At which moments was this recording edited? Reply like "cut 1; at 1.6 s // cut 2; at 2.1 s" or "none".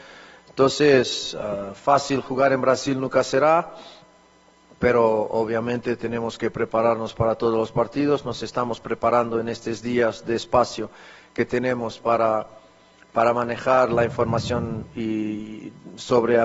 none